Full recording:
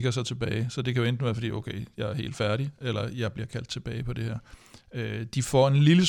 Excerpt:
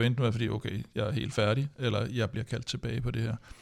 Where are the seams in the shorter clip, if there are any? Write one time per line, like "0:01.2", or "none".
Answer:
none